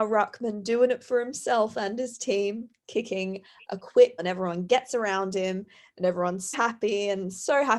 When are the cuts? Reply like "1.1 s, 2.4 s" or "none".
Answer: 4.2 s, 6.5 s